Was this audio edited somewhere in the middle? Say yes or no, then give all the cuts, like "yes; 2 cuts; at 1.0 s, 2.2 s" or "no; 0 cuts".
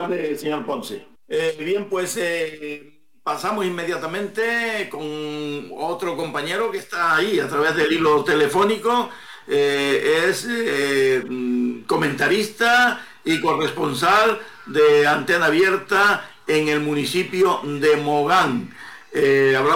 yes; 1 cut; at 1.2 s